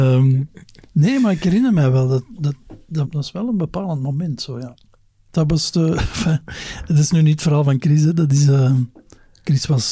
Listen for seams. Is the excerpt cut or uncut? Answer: cut